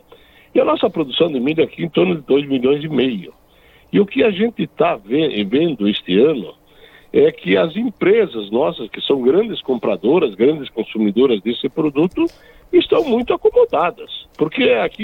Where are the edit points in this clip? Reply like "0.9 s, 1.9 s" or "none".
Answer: none